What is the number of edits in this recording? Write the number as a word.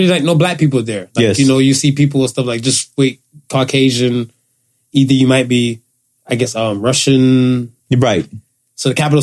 one